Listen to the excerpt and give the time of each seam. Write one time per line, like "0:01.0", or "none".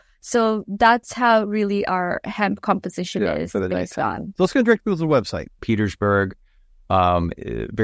0:04.3
0:05.6